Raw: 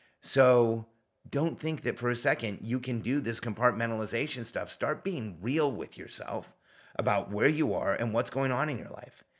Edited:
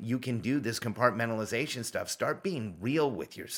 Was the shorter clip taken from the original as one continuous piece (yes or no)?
yes